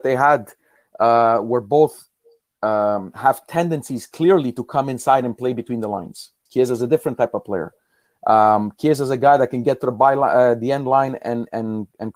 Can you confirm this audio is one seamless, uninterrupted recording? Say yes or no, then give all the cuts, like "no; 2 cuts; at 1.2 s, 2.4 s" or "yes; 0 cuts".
no; 1 cut; at 6.5 s